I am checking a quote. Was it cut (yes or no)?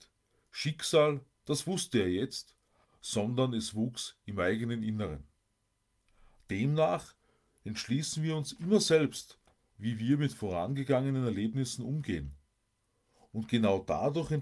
yes